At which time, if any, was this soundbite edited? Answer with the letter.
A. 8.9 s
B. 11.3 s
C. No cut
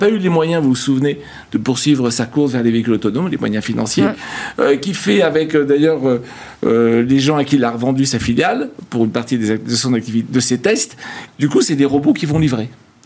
B